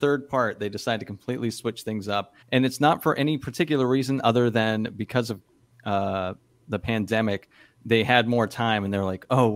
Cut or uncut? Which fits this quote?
cut